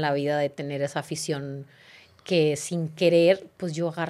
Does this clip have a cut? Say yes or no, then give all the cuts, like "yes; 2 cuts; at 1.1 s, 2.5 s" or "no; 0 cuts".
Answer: no; 0 cuts